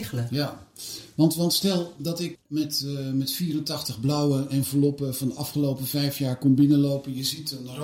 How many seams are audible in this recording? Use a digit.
1